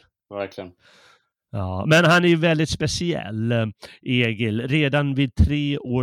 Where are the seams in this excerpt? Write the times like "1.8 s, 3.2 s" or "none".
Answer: none